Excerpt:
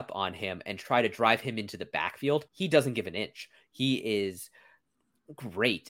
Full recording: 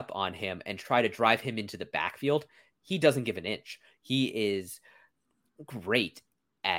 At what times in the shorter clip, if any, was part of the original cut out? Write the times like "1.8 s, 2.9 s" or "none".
2.5 s